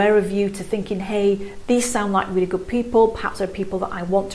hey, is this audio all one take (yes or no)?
yes